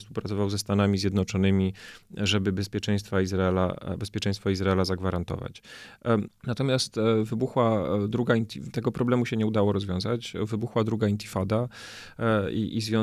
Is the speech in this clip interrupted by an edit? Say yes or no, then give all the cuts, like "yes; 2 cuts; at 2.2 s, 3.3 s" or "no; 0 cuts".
yes; 1 cut; at 6.3 s